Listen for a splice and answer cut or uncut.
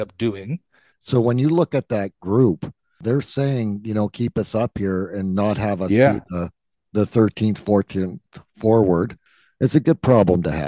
cut